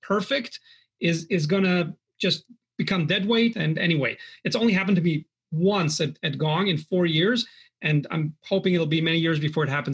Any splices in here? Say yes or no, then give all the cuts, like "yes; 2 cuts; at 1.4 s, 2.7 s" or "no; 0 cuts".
yes; 1 cut; at 3.5 s